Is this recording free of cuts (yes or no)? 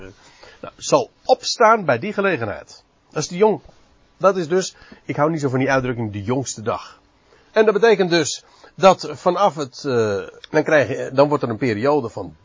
no